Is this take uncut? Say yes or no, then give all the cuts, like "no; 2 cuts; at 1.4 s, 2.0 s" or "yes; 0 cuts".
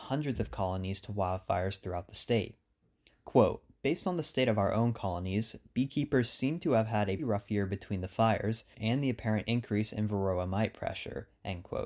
no; 2 cuts; at 7.2 s, 8.7 s